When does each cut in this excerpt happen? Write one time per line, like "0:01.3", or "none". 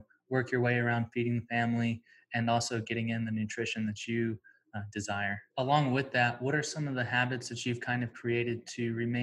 0:05.5